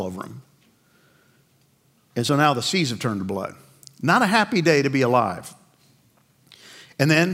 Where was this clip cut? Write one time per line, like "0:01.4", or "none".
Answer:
none